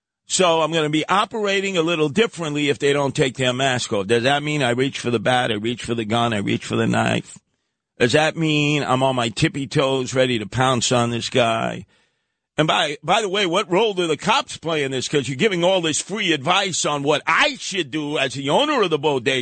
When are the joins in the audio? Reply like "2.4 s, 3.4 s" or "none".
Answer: none